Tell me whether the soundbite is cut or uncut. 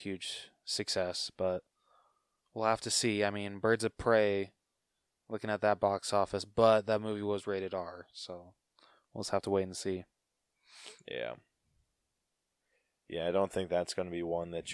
uncut